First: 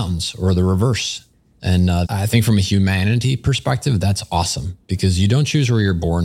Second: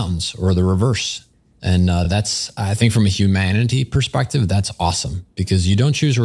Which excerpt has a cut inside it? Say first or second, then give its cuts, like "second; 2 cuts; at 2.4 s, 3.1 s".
first; 1 cut; at 2.0 s